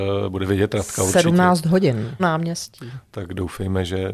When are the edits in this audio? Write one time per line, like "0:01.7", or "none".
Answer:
0:02.2